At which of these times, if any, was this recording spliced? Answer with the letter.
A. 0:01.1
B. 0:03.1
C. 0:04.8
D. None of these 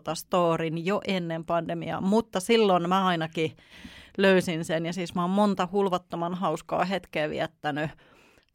D